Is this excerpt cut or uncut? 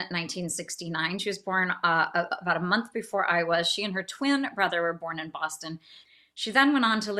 uncut